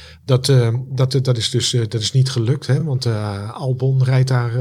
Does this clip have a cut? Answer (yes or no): no